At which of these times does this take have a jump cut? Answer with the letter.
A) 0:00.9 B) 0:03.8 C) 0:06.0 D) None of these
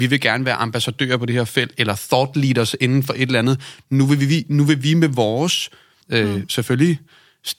C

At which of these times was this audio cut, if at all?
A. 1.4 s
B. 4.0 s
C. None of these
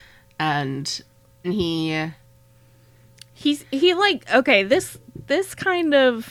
A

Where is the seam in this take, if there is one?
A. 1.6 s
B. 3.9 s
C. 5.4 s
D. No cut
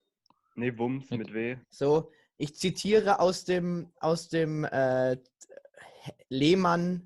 A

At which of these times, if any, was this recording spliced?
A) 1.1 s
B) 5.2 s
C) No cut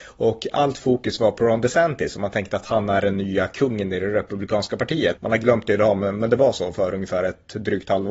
B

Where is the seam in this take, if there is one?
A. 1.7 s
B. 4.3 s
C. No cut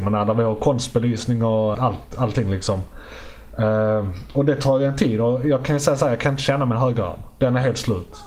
A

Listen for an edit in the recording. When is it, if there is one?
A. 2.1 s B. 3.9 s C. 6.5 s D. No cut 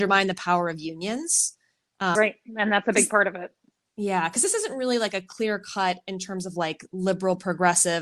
A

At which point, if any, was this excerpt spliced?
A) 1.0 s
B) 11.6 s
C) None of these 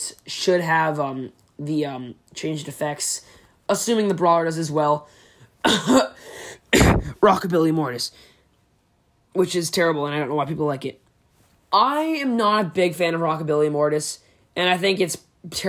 B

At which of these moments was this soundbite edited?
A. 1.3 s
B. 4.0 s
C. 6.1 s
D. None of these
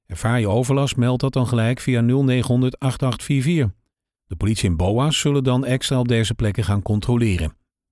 B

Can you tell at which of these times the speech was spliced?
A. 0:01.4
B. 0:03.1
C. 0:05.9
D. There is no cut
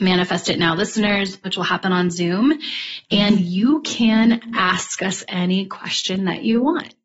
A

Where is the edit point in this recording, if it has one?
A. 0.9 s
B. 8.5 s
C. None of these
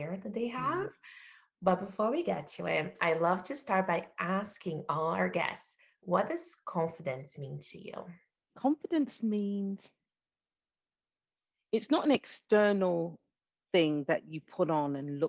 B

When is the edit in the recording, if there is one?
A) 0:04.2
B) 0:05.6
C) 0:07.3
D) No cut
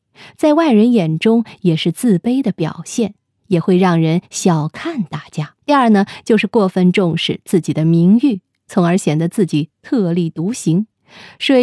B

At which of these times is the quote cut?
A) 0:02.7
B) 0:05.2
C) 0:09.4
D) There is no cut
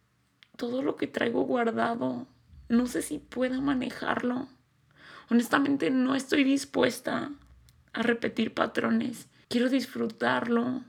C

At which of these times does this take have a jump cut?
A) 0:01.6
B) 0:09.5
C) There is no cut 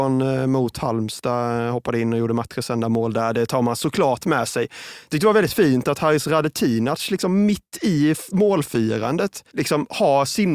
B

